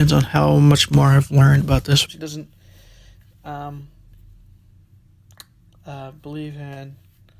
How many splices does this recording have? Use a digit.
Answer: 1